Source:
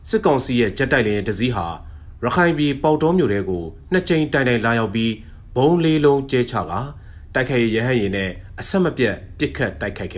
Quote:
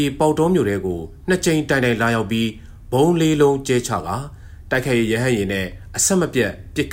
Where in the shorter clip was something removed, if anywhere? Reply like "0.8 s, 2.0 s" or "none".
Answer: none